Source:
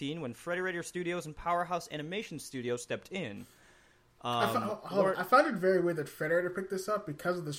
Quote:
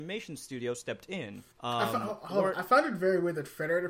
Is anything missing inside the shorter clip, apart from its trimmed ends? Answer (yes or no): yes